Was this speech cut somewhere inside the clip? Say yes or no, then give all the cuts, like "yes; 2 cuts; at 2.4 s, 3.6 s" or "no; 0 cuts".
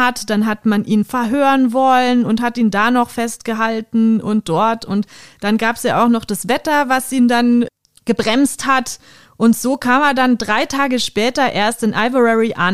no; 0 cuts